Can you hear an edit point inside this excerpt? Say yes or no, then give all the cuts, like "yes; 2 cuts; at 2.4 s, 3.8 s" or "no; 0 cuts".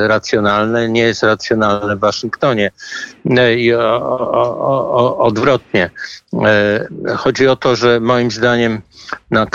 no; 0 cuts